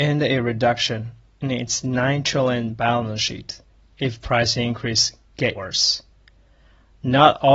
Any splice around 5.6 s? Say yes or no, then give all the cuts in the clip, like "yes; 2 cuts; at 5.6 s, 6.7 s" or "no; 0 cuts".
yes; 1 cut; at 5.6 s